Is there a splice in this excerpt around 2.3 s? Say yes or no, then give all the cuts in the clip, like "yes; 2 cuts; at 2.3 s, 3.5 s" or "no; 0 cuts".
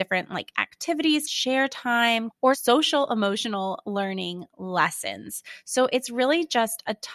yes; 2 cuts; at 1.3 s, 2.3 s